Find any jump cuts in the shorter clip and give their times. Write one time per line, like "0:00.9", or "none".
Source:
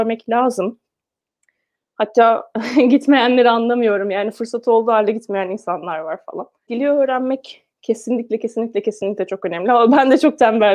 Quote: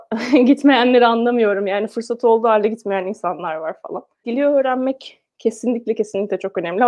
0:06.0